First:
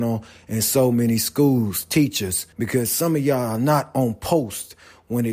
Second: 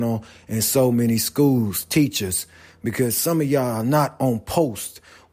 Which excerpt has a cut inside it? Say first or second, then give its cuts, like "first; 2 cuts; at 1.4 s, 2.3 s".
first; 1 cut; at 2.5 s